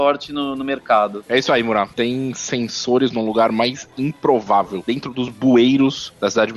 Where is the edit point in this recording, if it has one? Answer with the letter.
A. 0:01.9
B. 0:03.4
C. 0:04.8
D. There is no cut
A